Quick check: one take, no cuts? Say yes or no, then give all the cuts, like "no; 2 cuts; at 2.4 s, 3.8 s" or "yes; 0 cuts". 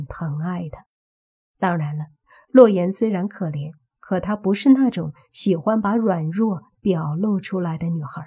yes; 0 cuts